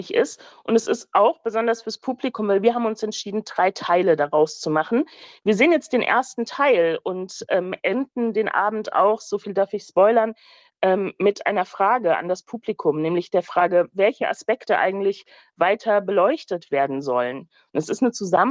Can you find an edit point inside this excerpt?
no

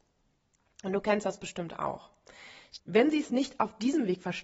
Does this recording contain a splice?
yes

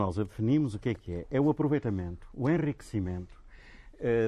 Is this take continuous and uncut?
yes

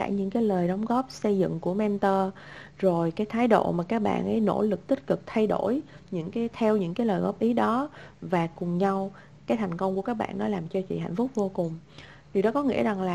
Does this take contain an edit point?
no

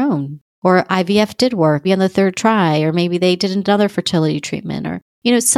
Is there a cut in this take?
yes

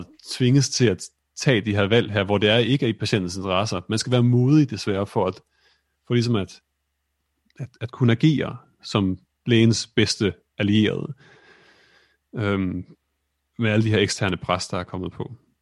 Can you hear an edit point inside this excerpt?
no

